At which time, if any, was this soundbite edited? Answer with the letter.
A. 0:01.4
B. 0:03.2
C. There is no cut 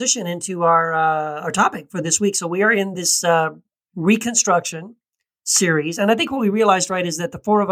C